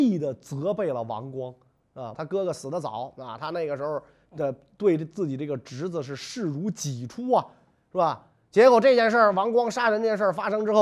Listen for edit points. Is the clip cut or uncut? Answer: cut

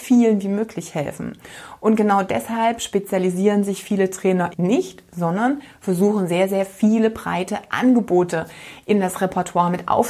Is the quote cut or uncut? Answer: cut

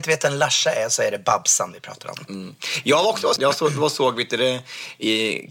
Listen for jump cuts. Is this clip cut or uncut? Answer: cut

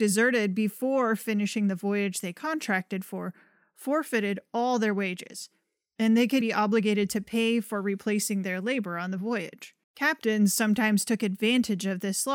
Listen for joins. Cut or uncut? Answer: cut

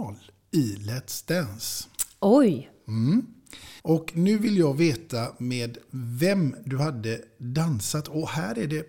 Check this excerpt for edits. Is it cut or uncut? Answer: cut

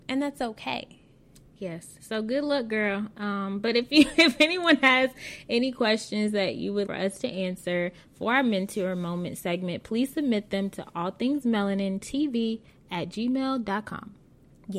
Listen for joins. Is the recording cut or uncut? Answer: cut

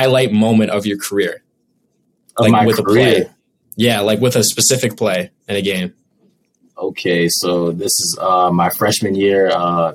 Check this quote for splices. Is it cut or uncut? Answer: uncut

